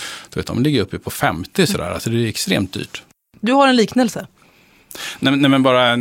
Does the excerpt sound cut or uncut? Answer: uncut